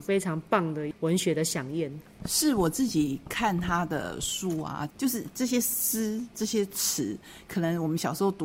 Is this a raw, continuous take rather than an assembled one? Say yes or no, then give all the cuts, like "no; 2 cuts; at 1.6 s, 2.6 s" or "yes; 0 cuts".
no; 1 cut; at 4.9 s